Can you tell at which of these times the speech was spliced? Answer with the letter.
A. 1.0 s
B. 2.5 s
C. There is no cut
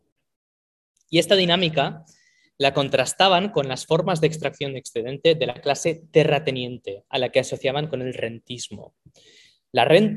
C